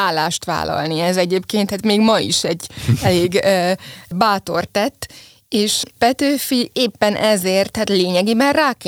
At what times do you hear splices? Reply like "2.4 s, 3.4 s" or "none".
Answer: none